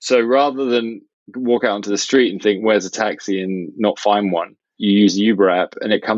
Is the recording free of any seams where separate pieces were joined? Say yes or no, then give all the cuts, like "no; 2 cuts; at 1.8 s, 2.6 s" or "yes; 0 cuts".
yes; 0 cuts